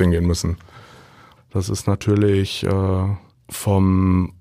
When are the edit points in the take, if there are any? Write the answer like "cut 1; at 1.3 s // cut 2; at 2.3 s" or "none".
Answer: cut 1; at 1.4 s